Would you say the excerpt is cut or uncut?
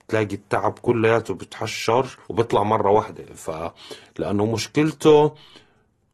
cut